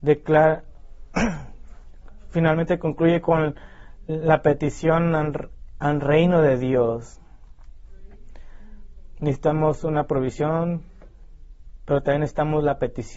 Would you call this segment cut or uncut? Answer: uncut